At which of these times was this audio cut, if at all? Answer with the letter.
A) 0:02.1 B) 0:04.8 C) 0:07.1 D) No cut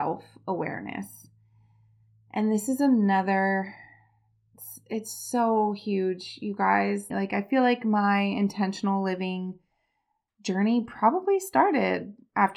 C